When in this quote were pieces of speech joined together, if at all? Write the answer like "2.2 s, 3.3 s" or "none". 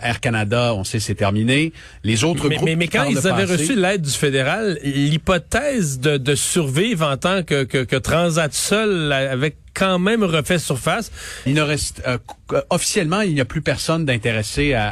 11.5 s

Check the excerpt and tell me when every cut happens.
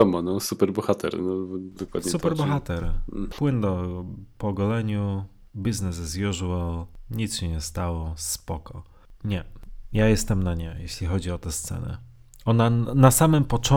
3.3 s

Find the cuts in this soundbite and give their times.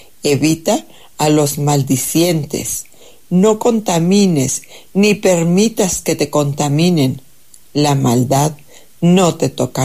none

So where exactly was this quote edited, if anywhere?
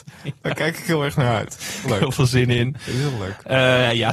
1.8 s

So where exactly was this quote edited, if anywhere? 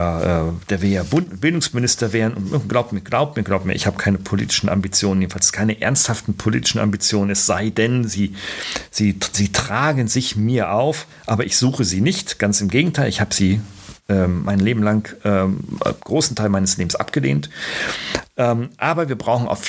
none

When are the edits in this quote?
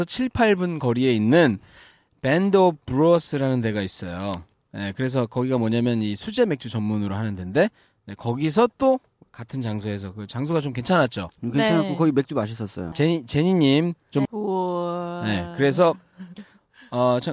12.9 s, 14.3 s

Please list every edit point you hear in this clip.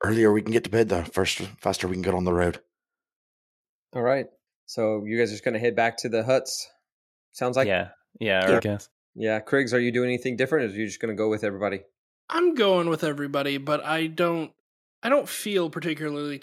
8.6 s

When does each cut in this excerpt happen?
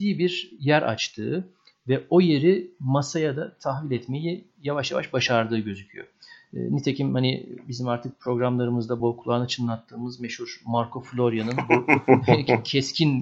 9.0 s

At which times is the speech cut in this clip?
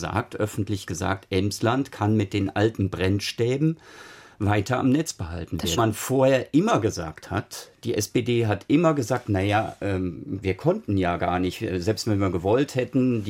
5.8 s, 10.4 s

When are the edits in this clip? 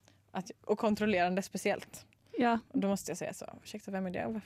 none

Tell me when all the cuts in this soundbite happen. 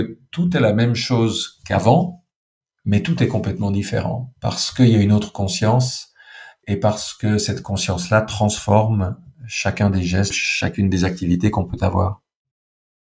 6.6 s, 10.3 s

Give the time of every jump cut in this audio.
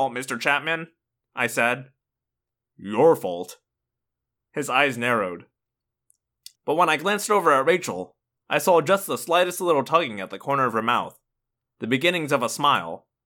6.5 s

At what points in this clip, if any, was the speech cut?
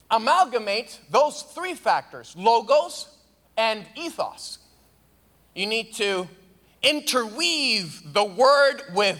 3.4 s

